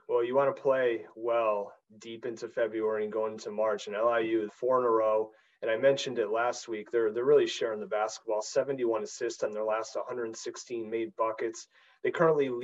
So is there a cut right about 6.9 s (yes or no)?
no